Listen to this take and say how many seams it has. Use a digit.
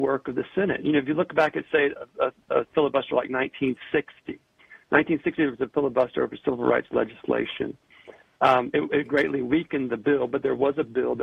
0